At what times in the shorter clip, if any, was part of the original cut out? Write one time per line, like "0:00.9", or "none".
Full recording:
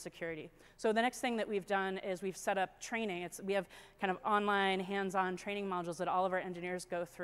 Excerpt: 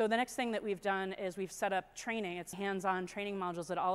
0:02.5